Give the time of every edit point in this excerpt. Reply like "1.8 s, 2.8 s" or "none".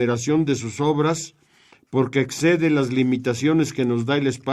none